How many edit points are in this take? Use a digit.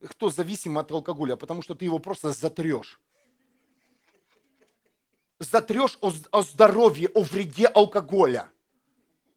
0